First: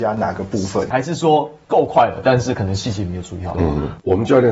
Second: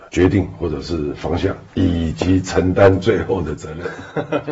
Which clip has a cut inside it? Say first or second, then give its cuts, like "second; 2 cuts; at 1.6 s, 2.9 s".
first; 2 cuts; at 0.9 s, 3.5 s